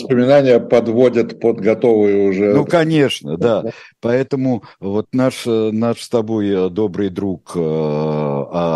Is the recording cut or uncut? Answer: uncut